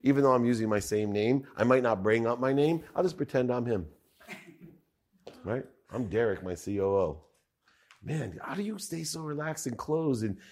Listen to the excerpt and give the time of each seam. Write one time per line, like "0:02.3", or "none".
none